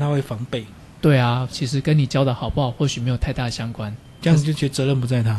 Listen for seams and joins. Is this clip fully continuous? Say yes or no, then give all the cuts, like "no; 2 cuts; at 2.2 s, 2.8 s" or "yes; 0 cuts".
no; 2 cuts; at 1.5 s, 4.2 s